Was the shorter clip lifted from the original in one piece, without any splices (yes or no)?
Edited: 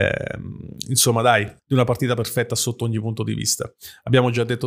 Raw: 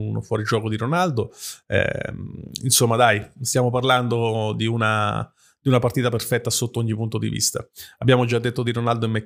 no